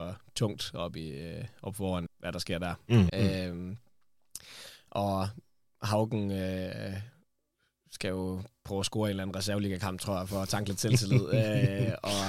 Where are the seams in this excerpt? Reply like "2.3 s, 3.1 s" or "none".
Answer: 2.1 s, 3.1 s